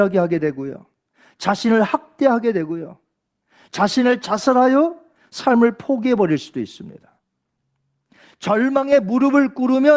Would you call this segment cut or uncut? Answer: uncut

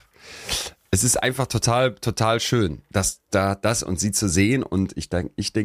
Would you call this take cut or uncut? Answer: uncut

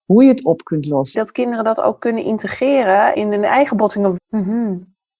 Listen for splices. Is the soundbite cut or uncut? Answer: cut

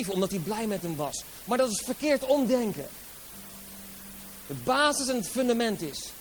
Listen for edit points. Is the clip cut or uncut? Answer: uncut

